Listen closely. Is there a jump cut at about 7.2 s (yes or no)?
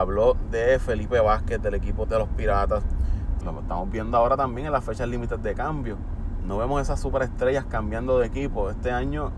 no